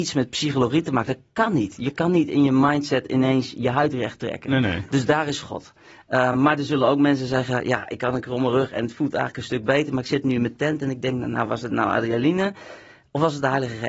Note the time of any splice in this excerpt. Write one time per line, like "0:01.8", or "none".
none